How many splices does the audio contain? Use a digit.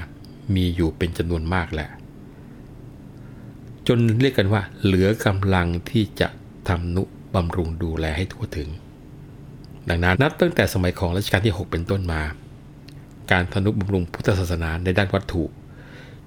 1